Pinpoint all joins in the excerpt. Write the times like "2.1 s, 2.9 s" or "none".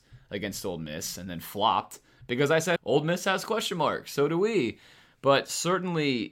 2.8 s